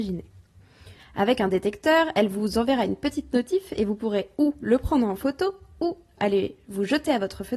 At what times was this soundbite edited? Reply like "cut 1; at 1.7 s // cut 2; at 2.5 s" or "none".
cut 1; at 1.0 s